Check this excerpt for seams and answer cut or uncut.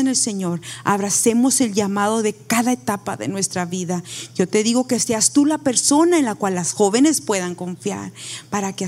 cut